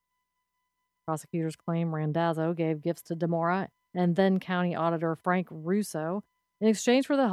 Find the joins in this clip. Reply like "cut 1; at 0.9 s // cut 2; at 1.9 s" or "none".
cut 1; at 1.0 s